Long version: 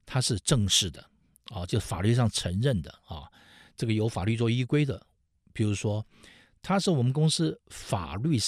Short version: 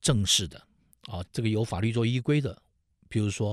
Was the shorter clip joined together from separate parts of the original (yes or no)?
yes